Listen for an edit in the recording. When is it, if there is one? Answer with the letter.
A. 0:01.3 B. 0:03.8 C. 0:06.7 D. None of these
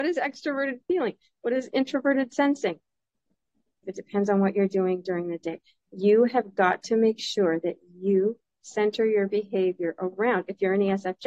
B